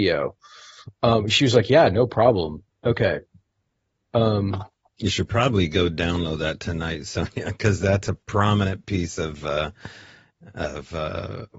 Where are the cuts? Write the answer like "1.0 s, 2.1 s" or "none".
2.7 s